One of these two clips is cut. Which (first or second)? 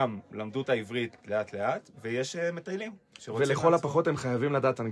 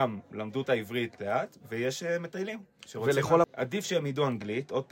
second